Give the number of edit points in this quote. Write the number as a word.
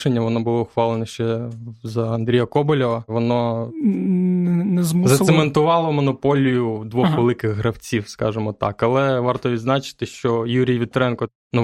zero